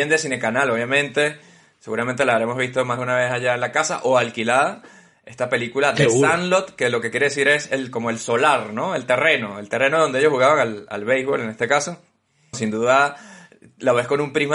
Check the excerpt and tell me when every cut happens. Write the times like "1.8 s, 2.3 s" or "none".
12.5 s